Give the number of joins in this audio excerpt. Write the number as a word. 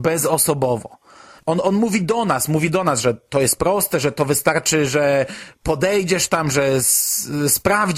one